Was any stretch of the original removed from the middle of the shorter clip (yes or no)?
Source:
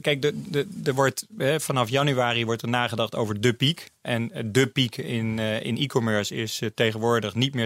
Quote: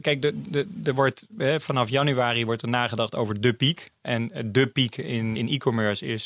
yes